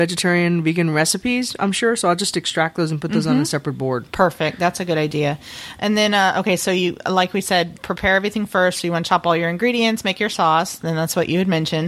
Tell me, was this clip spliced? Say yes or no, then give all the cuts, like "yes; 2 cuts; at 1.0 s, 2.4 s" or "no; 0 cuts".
no; 0 cuts